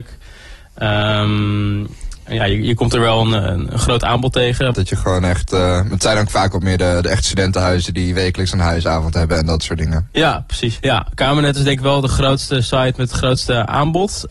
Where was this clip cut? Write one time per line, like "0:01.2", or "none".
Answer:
0:04.7
0:10.8